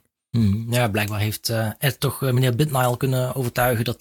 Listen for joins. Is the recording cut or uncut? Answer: uncut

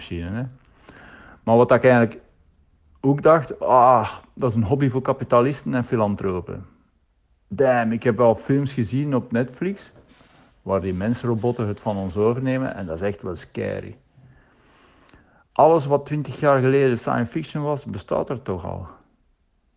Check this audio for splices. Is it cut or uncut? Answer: uncut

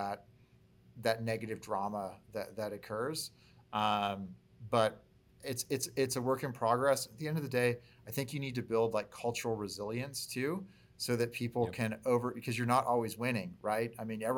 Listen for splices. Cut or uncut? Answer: uncut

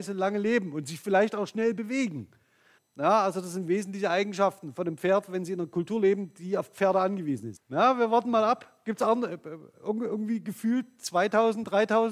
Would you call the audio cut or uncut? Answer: cut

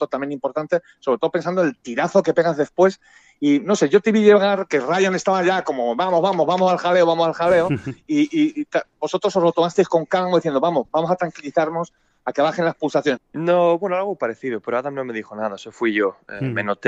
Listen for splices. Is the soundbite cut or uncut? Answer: cut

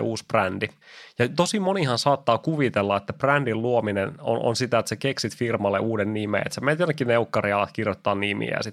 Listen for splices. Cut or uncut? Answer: uncut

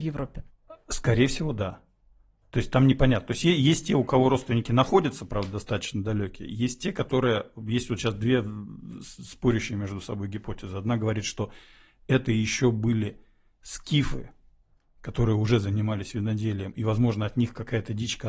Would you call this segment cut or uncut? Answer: uncut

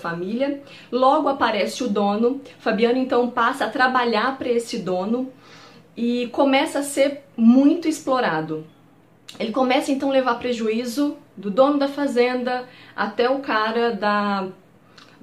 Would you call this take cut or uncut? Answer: uncut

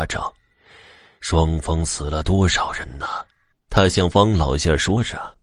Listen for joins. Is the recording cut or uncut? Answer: cut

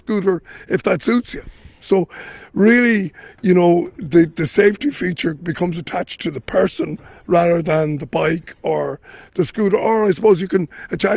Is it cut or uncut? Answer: cut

